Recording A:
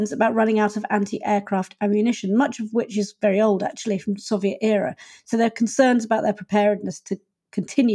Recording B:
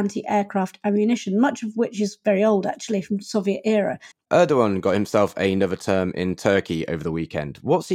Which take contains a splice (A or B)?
B